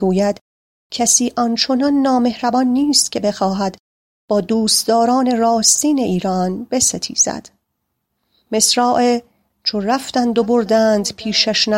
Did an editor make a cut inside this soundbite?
no; 0 cuts

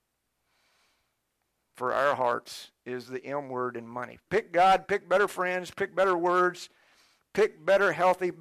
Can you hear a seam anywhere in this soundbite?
yes; 1 cut; at 4.3 s

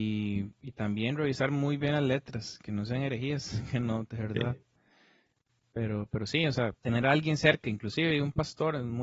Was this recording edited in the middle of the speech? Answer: yes; 3 cuts; at 2.6 s, 4.1 s, 6.8 s

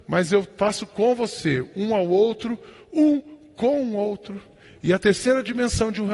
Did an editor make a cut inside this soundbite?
no; 0 cuts

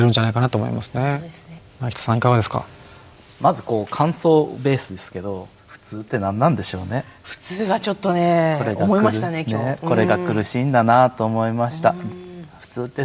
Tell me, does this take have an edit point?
yes; 1 cut; at 1.6 s

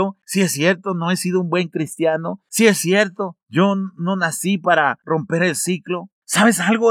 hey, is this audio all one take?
yes; 0 cuts

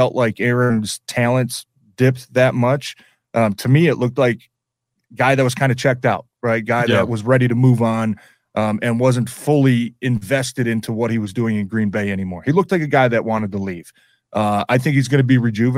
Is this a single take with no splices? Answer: yes; 0 cuts

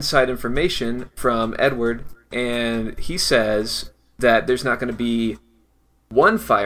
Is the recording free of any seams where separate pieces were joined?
yes; 0 cuts

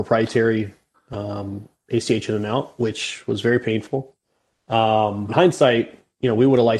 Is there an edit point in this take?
yes; 1 cut; at 5.3 s

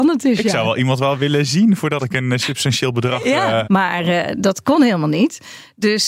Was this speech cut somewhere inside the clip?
yes; 1 cut; at 3.6 s

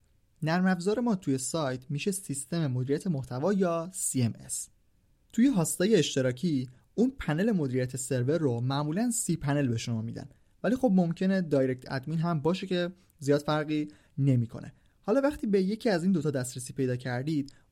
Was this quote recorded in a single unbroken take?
yes; 0 cuts

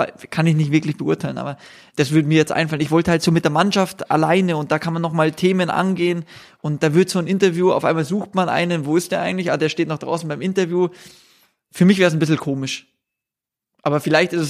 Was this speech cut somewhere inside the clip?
no; 0 cuts

